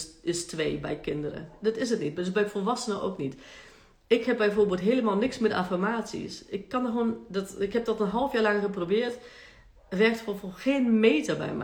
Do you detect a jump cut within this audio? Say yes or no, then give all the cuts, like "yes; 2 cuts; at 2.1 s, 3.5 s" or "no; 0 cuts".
no; 0 cuts